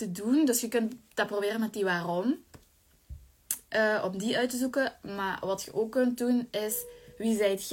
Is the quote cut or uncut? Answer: uncut